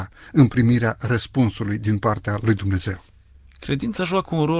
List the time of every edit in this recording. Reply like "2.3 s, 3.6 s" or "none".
none